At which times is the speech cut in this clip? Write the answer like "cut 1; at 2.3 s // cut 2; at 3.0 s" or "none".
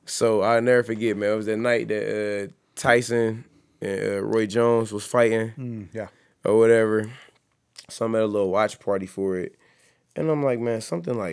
none